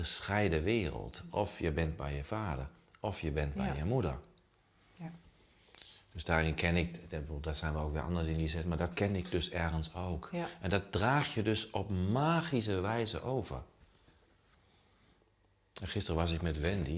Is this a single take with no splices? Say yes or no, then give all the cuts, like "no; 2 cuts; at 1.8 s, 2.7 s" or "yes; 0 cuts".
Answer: yes; 0 cuts